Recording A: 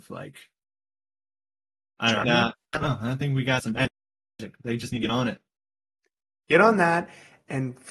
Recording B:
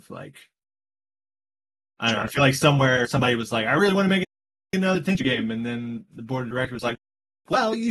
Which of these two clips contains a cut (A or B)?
A